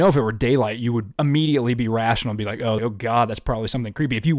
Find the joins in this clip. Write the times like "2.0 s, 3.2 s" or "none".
2.8 s